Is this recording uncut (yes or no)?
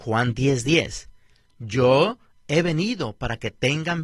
yes